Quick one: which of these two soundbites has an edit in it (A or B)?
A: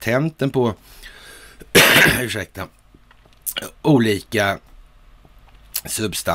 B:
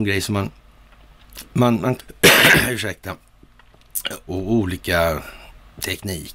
B